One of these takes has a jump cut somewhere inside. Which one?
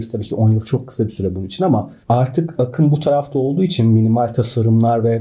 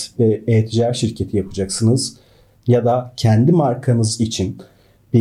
first; 1 cut; at 2.0 s

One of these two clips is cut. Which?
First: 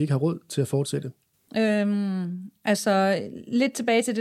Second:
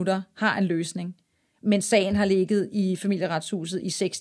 first; 1 cut; at 1.5 s

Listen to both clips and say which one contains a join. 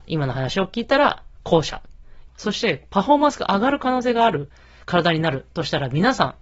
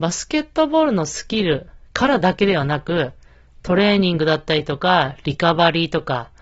first; 1 cut; at 2.3 s

